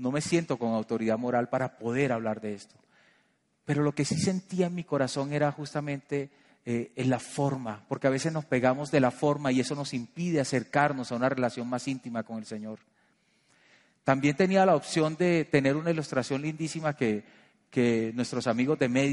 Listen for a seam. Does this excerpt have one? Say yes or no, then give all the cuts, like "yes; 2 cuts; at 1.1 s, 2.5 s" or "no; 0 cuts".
no; 0 cuts